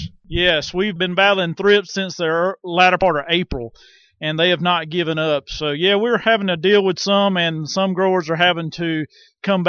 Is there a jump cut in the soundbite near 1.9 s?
yes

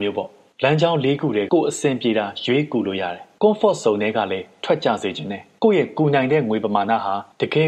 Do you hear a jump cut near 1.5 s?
yes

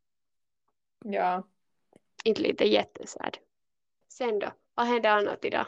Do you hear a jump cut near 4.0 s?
yes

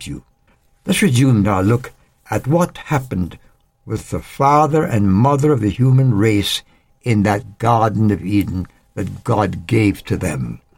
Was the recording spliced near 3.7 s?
no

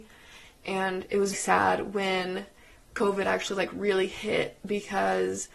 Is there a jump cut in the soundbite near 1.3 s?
yes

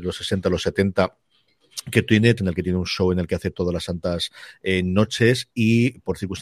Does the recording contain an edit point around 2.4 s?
yes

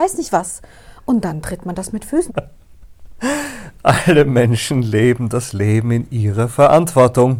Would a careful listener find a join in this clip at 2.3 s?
yes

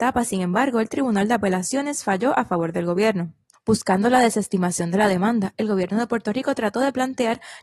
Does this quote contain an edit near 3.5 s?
yes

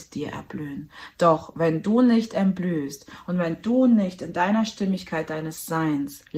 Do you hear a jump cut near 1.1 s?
no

